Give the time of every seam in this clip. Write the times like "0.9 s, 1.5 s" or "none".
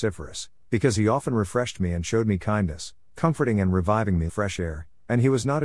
4.3 s